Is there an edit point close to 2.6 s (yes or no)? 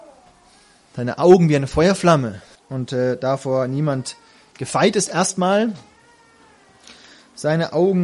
yes